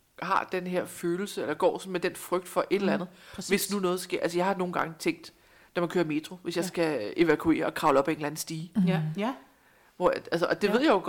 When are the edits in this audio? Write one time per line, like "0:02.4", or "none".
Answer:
none